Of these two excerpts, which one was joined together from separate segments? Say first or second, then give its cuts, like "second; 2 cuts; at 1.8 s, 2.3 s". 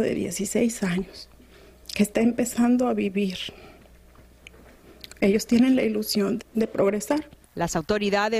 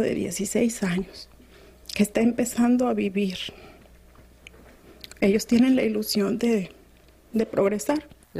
first; 1 cut; at 6.4 s